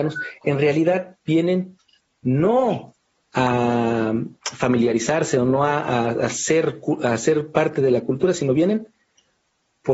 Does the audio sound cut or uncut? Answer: uncut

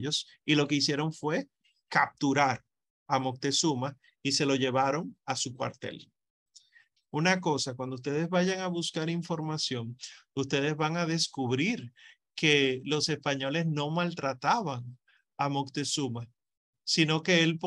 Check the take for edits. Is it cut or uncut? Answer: cut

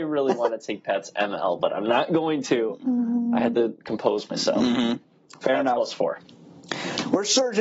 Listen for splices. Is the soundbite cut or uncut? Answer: uncut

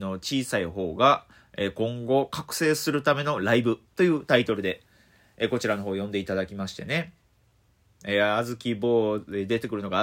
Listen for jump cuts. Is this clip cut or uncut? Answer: uncut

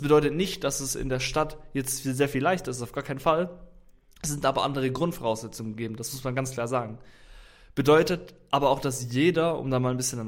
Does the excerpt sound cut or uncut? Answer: uncut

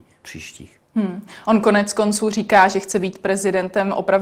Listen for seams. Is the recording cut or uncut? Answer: uncut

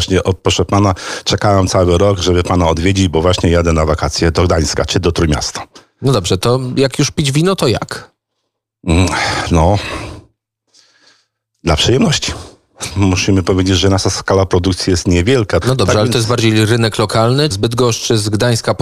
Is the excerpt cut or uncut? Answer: cut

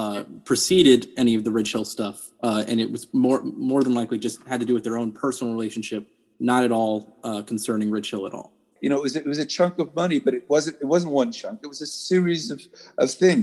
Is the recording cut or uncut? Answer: cut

